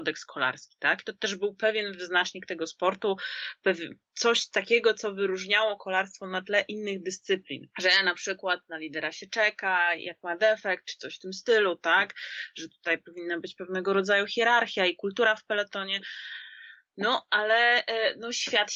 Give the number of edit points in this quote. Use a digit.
0